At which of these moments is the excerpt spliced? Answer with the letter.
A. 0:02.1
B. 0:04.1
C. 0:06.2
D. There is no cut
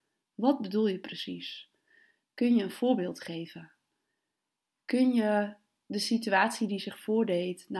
D